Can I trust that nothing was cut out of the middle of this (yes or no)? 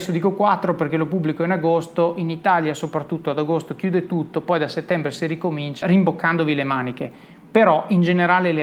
no